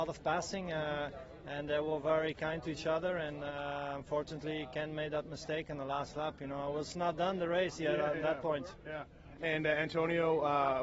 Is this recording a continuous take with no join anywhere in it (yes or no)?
yes